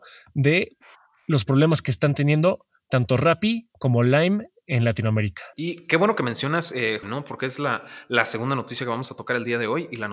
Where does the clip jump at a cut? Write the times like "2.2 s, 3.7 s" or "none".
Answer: 5.5 s, 7.0 s